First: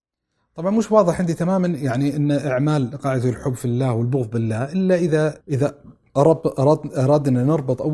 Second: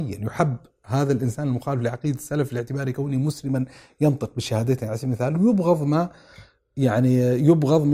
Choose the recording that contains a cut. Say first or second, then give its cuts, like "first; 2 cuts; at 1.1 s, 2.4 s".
first; 1 cut; at 5.4 s